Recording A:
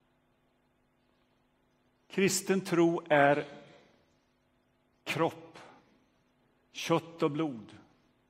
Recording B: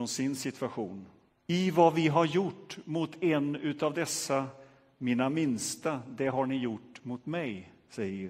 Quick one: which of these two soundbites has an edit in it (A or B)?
B